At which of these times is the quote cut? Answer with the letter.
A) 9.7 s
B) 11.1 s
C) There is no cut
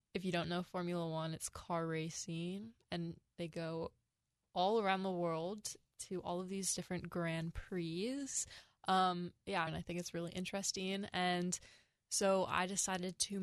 A